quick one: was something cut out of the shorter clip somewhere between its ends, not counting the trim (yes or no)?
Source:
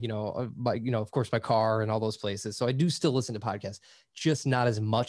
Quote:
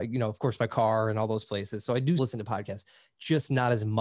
yes